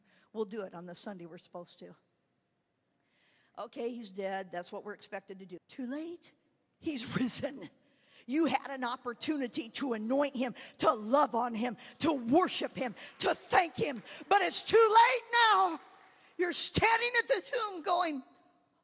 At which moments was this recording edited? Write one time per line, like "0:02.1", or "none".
0:05.6